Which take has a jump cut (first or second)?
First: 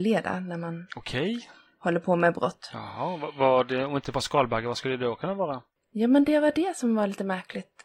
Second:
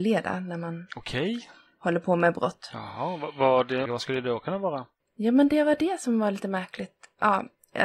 second